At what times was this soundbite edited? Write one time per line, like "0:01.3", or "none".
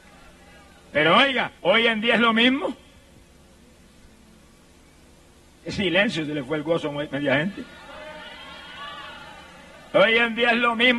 0:01.6

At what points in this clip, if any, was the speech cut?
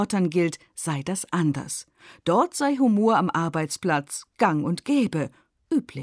none

